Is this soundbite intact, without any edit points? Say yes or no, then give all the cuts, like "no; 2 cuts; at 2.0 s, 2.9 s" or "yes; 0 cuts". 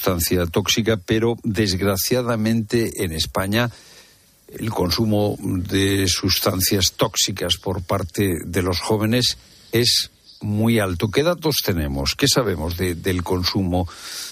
yes; 0 cuts